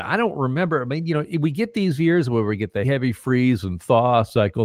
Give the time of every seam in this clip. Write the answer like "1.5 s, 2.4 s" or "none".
2.8 s